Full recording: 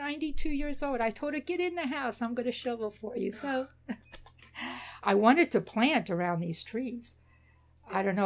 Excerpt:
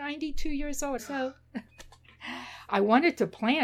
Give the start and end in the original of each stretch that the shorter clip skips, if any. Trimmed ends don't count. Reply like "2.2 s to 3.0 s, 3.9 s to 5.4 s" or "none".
1.0 s to 3.3 s